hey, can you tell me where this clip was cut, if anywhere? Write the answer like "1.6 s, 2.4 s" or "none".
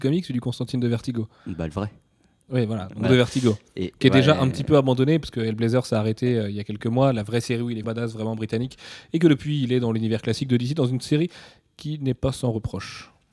7.8 s